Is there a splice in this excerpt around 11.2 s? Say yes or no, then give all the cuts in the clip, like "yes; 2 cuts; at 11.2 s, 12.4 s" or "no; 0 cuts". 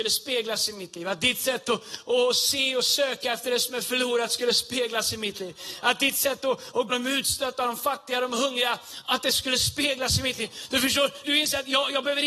yes; 2 cuts; at 6.9 s, 11.2 s